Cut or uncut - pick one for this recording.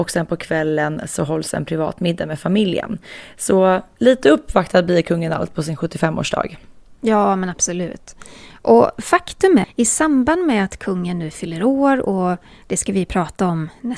cut